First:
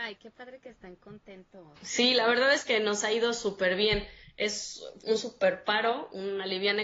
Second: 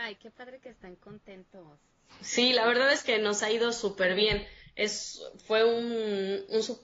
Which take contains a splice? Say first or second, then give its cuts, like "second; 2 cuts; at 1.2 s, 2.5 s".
first; 2 cuts; at 1.8 s, 5.0 s